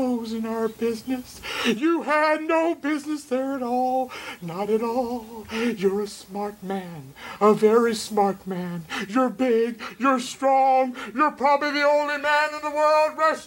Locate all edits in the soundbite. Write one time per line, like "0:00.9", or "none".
none